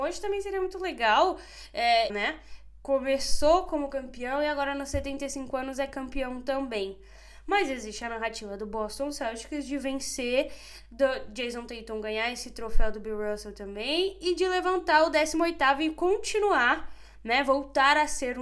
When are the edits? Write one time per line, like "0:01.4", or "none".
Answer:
0:02.1